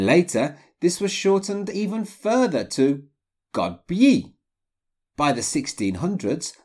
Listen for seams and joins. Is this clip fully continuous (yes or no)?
yes